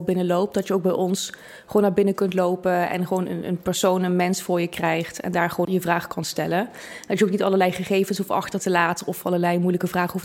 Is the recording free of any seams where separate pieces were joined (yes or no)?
yes